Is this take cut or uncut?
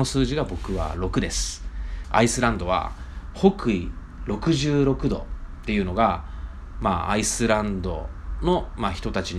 cut